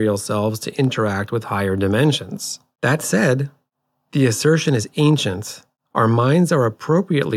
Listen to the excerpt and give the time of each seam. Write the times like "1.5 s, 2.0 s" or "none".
5.9 s

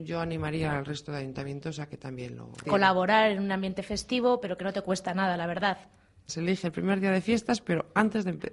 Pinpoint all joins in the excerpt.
2.6 s, 6.3 s

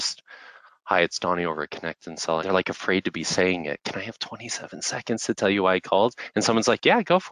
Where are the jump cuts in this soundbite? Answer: 2.4 s

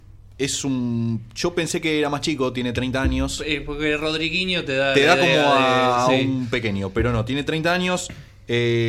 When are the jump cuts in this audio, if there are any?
none

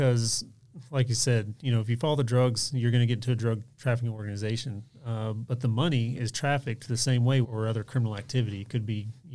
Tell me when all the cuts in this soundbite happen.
7.4 s

